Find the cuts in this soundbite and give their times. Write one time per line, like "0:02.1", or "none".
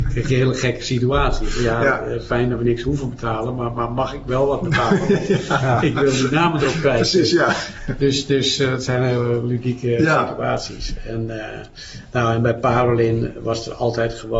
none